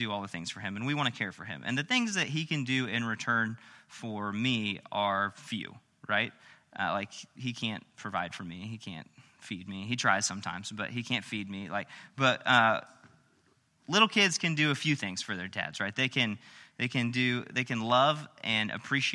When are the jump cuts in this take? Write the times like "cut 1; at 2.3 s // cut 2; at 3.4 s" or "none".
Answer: none